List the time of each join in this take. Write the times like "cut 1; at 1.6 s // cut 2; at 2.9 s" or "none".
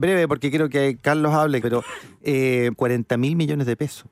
cut 1; at 1.6 s // cut 2; at 2.7 s